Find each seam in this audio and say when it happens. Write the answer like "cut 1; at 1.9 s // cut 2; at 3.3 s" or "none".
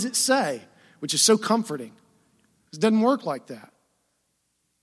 cut 1; at 2.7 s